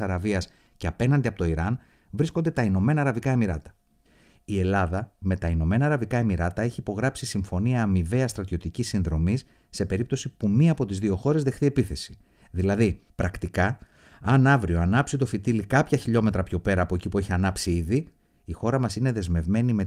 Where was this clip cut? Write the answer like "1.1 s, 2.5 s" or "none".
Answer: none